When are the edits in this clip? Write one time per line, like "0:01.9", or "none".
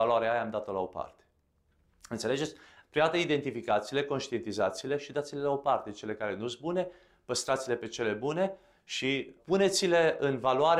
0:02.8
0:09.4

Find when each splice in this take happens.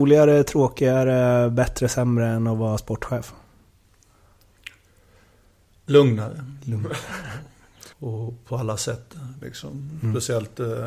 0:07.9
0:09.4

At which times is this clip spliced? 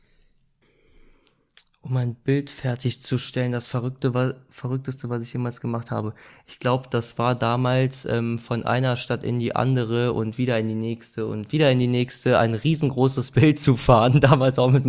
none

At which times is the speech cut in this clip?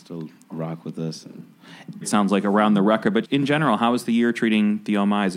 0:02.0
0:03.2

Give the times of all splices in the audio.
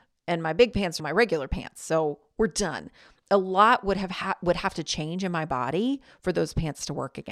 0:01.0

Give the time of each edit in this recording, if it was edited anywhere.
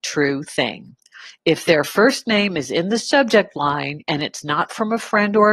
none

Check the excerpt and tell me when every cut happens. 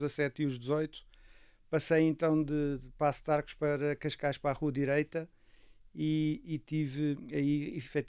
none

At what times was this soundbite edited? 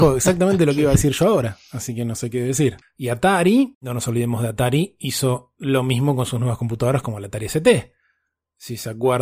0:02.8

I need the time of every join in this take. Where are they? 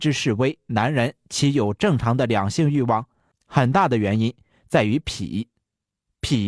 0:03.3

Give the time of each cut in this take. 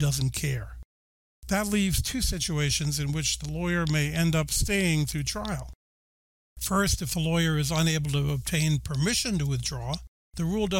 none

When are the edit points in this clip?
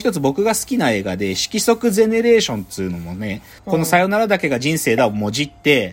0:03.6

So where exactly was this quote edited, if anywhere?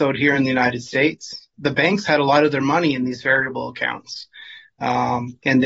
0:01.5

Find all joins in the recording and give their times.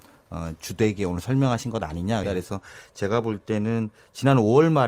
0:02.2

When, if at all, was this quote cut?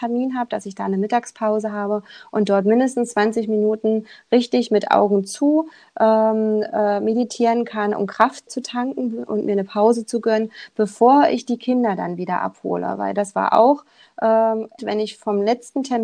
0:08.5
0:14.8

